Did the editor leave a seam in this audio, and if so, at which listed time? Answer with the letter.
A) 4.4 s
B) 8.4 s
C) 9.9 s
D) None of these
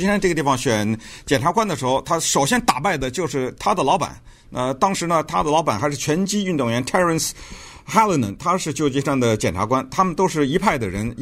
D